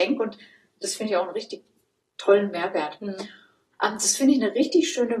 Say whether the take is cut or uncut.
cut